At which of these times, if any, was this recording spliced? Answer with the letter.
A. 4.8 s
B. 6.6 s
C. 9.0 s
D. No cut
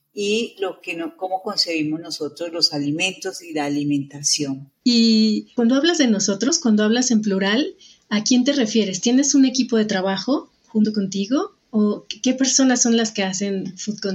A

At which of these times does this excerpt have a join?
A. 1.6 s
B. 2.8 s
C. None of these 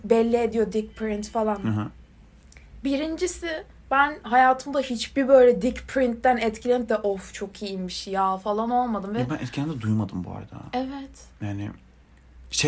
C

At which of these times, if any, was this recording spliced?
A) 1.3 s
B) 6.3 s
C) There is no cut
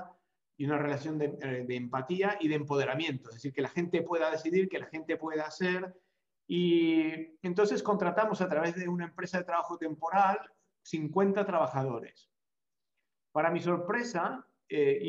B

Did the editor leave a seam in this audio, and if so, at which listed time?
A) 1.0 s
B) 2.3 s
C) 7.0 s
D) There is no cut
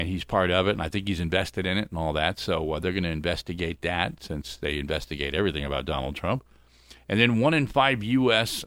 D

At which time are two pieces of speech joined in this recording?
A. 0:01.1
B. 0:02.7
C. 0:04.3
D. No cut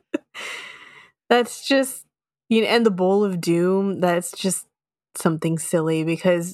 D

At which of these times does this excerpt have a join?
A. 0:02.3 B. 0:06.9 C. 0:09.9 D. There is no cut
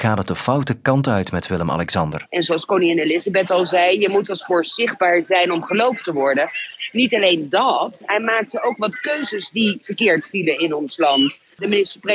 A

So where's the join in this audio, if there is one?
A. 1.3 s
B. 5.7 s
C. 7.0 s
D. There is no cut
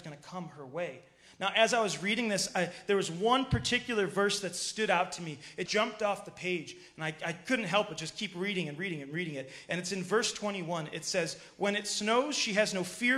B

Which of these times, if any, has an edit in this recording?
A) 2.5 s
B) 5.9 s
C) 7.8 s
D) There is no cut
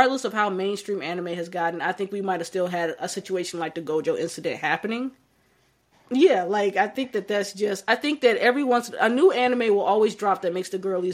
B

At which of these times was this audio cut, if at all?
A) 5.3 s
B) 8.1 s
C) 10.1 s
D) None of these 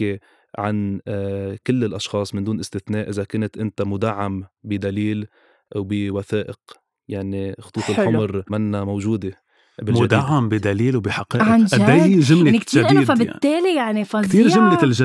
D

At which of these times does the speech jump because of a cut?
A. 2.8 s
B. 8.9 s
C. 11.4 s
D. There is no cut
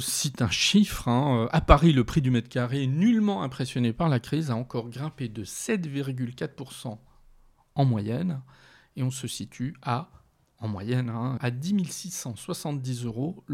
C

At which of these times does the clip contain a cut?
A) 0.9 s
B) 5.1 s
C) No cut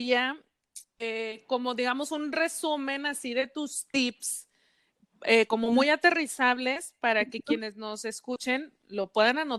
C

